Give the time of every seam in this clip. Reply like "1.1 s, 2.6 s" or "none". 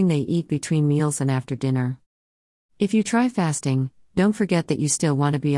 none